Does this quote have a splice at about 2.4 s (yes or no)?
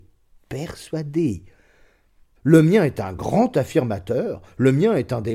yes